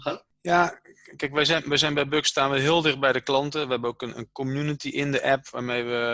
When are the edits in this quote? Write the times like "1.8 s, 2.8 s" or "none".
none

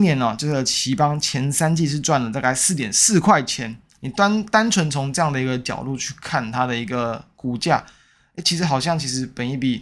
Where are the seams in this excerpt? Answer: 3.9 s

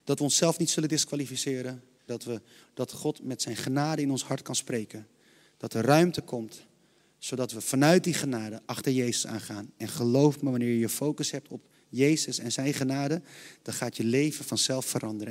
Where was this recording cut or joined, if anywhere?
2.1 s

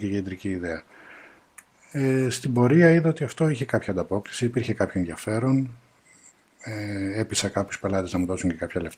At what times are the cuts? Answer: none

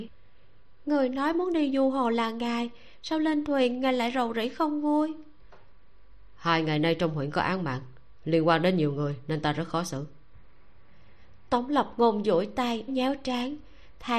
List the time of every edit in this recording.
12.9 s

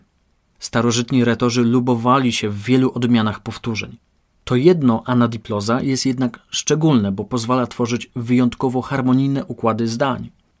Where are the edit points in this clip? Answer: none

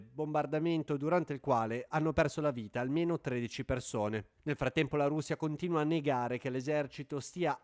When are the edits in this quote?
4.4 s

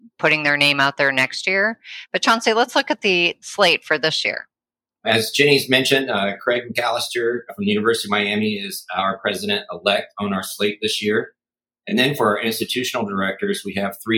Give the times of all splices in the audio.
none

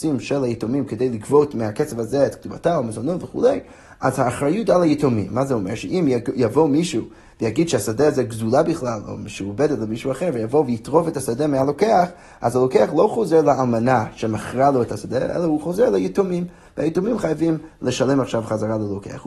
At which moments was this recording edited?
none

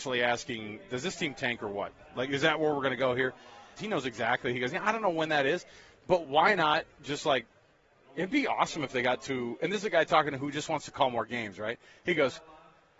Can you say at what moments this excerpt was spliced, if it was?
3.8 s

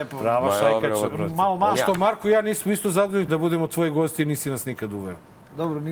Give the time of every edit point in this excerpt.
1.7 s, 3.3 s

